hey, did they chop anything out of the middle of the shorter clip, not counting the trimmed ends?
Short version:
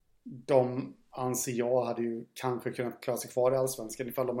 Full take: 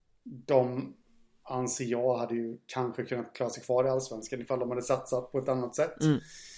yes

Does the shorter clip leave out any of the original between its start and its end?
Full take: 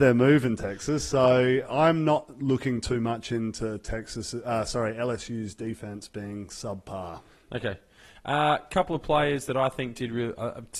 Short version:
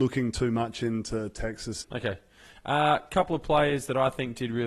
yes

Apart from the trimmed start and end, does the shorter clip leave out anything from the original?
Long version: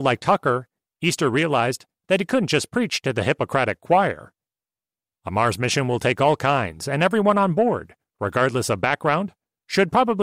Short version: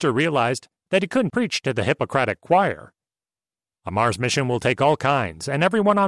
yes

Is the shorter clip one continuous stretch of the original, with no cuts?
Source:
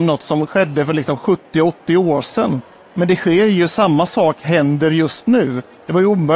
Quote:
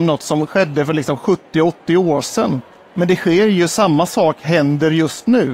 yes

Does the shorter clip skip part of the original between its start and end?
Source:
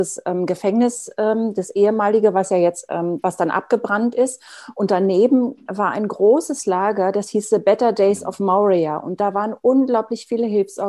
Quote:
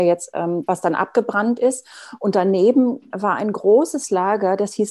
no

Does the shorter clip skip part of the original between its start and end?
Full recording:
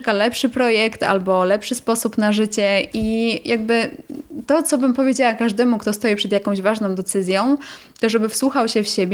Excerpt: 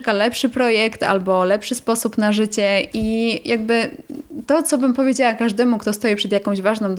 no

